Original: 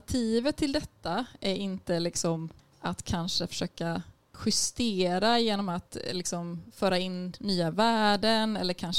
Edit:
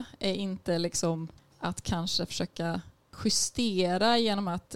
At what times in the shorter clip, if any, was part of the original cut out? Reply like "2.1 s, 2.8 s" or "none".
none